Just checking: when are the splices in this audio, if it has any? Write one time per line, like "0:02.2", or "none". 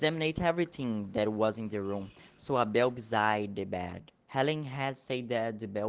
0:04.2